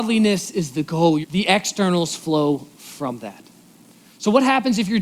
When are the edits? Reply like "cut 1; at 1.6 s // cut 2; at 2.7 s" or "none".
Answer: cut 1; at 1.2 s